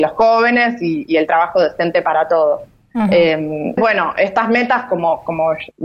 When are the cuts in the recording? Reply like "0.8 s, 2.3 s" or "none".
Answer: 3.8 s